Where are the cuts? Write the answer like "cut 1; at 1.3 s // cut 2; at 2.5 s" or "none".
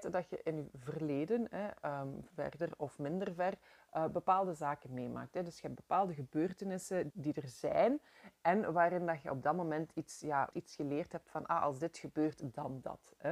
cut 1; at 7.1 s // cut 2; at 10.5 s